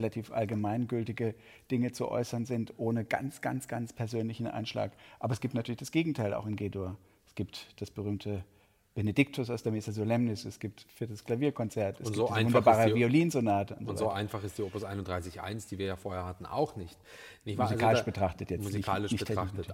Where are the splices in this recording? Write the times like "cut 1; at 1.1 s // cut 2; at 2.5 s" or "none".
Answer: none